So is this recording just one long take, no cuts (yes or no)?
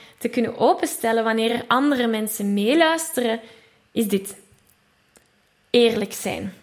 yes